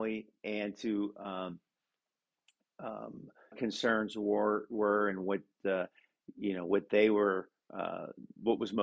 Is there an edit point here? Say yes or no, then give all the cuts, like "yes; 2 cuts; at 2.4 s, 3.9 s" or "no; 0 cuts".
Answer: yes; 1 cut; at 3.5 s